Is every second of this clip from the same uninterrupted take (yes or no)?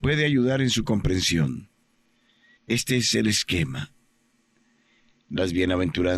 no